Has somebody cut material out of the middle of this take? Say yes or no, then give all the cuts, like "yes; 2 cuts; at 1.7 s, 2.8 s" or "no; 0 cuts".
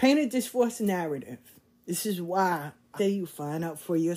yes; 1 cut; at 3.0 s